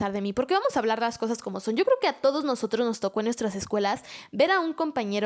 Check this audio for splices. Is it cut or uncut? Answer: uncut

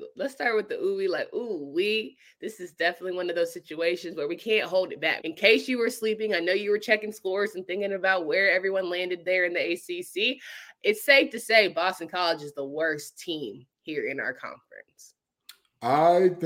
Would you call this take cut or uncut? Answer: cut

